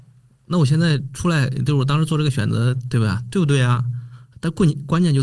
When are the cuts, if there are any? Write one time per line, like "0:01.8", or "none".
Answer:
0:04.3